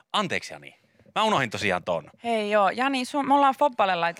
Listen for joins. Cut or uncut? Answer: uncut